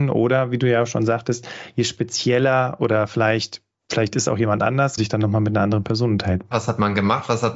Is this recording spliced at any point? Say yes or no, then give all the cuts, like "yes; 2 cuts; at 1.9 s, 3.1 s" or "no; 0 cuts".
yes; 2 cuts; at 5.0 s, 6.5 s